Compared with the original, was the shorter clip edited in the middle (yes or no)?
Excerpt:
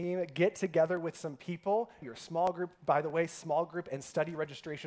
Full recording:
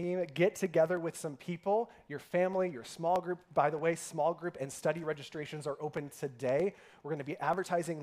yes